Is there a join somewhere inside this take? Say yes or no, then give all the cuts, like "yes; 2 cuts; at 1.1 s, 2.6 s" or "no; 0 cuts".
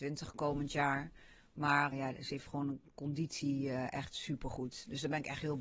yes; 1 cut; at 1.9 s